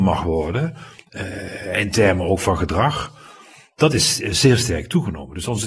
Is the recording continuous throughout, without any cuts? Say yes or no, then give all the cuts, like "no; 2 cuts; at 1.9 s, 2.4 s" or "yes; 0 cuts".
yes; 0 cuts